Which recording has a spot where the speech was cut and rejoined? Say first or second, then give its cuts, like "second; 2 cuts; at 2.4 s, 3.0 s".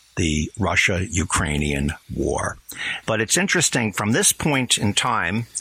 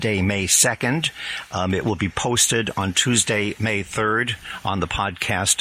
first; 1 cut; at 3.0 s